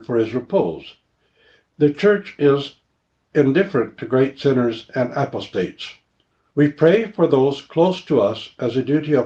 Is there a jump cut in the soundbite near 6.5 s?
yes; 2 cuts; at 3.2 s, 6.5 s

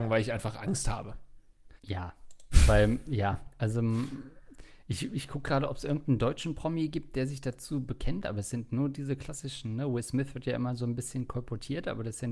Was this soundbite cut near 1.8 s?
yes; 1 cut; at 1.8 s

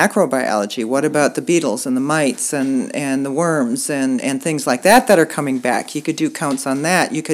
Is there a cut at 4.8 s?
no; 0 cuts

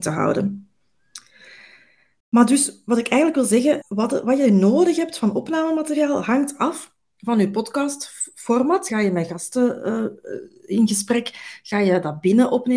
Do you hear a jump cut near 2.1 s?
no; 2 cuts; at 3.8 s, 8.9 s

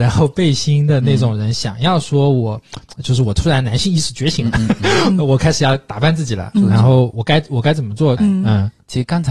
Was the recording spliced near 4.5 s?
no; 2 cuts; at 7.1 s, 8.2 s

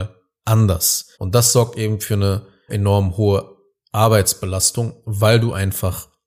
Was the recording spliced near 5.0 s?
no; 2 cuts; at 1.1 s, 2.7 s

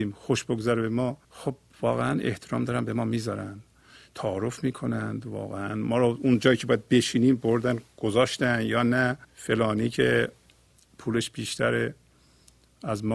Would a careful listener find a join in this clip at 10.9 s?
no; 2 cuts; at 1.2 s, 9.2 s

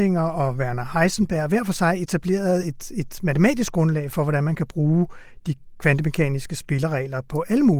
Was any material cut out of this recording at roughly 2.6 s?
no; 0 cuts

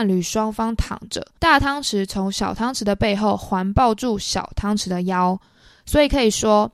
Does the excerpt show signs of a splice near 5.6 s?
no; 1 cut; at 1.4 s

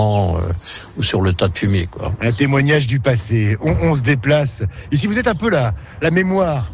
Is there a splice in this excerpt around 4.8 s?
no; 0 cuts

